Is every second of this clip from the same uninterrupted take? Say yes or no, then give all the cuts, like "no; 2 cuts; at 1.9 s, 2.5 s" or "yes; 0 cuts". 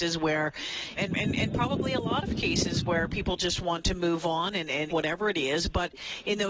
no; 2 cuts; at 1.0 s, 4.9 s